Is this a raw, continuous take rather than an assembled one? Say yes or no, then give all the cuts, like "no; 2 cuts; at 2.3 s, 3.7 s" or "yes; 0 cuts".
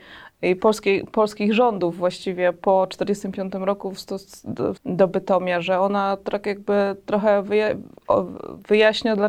no; 1 cut; at 4.8 s